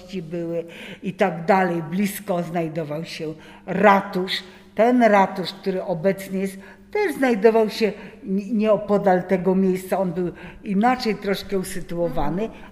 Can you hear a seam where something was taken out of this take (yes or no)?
no